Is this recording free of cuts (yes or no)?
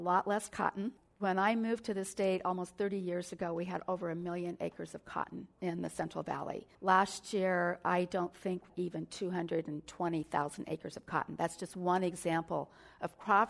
no